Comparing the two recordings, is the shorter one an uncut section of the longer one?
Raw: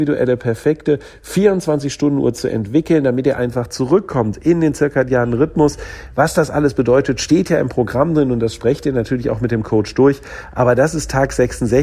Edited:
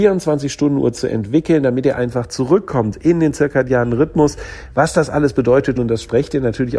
no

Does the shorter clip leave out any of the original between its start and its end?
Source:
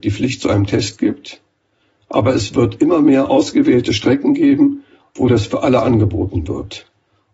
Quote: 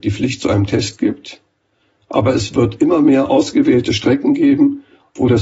no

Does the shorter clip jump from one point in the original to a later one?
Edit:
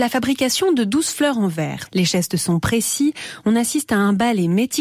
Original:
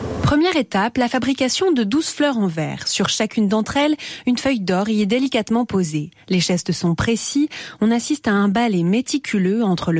yes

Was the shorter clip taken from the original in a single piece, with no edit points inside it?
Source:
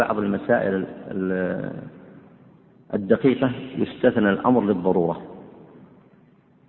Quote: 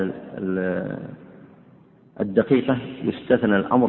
yes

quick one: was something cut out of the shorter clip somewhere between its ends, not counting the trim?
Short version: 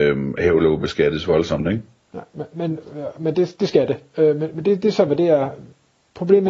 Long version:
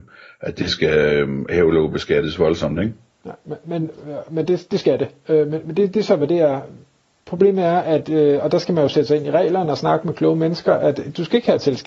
no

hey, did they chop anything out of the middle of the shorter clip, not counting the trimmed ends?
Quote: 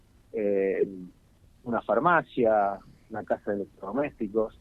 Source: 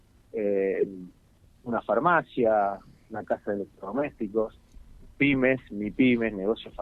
no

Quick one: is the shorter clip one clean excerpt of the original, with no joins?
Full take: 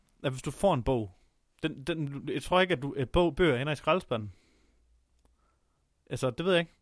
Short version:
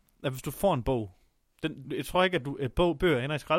no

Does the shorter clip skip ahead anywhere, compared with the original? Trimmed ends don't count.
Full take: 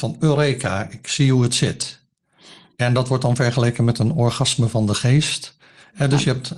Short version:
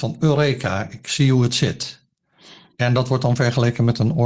no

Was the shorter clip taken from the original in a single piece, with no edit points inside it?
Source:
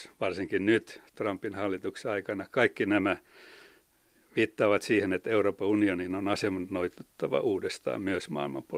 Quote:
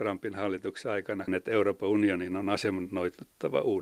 no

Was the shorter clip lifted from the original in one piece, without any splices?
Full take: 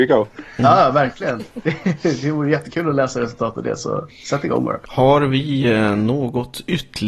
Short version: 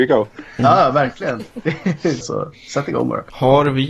no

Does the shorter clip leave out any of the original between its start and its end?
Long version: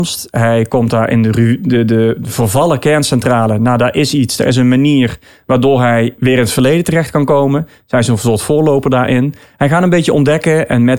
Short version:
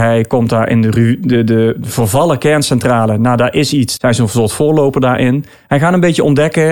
yes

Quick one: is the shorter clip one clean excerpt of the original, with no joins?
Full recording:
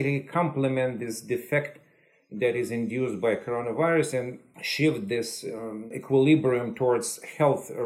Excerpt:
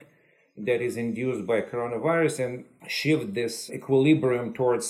no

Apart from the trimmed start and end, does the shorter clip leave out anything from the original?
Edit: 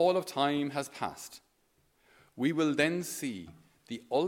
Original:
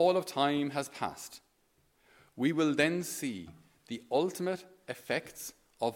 no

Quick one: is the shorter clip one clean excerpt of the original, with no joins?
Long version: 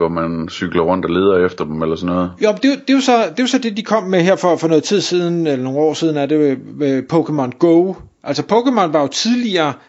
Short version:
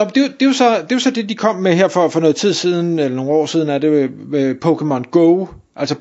yes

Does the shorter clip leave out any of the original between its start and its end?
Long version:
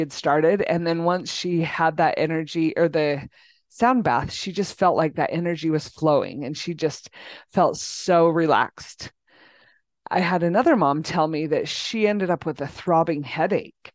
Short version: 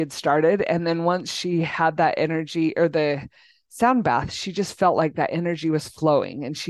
no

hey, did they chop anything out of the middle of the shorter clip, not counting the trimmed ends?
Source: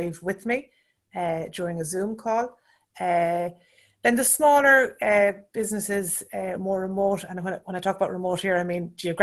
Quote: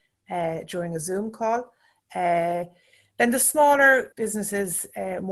yes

